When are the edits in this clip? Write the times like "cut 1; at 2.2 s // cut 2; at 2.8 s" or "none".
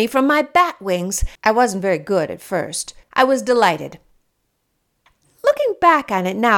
cut 1; at 1.4 s // cut 2; at 3.1 s